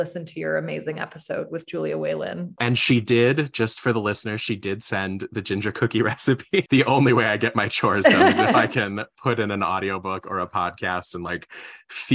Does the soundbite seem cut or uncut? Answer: cut